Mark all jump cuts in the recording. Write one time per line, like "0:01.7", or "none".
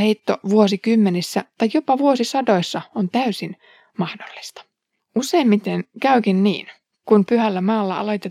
0:05.0